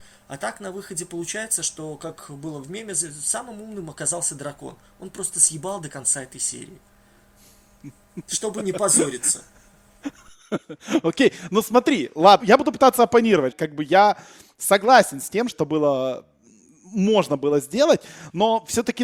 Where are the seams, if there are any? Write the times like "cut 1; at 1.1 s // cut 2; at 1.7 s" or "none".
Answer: cut 1; at 12.4 s // cut 2; at 13.5 s // cut 3; at 15.5 s